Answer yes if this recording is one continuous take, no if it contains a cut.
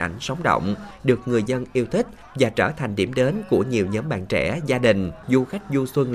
yes